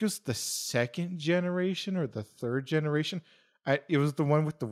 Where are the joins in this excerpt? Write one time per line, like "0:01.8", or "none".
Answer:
none